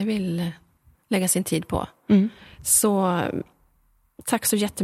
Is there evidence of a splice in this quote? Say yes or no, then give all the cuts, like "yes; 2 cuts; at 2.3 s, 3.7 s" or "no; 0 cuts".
no; 0 cuts